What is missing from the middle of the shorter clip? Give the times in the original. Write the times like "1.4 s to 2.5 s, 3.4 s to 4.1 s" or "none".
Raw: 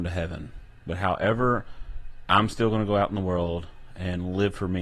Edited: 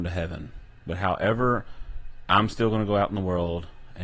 none